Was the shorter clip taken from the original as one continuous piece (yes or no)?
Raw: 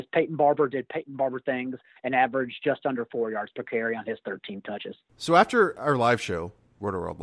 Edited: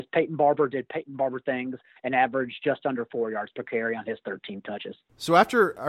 yes